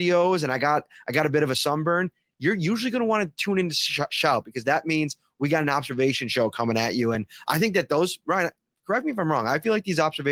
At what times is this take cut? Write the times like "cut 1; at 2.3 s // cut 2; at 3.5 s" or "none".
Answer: none